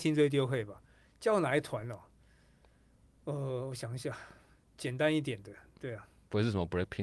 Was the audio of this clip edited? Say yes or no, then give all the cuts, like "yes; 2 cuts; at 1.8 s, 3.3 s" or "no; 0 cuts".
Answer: no; 0 cuts